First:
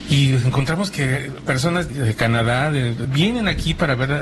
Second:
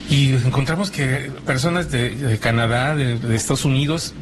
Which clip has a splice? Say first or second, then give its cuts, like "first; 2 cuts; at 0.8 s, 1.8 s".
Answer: first; 2 cuts; at 1.9 s, 3.0 s